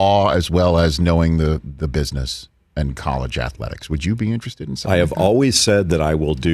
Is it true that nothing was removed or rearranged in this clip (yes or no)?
yes